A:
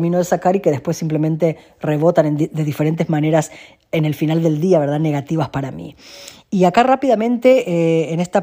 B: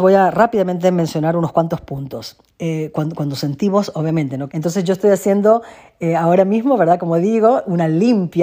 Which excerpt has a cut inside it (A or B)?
B